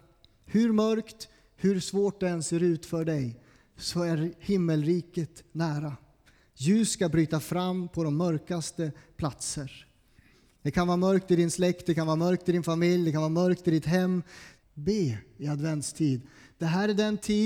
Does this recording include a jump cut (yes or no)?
yes